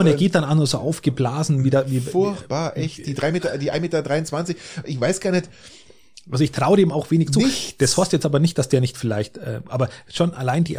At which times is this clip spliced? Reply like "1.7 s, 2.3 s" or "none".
none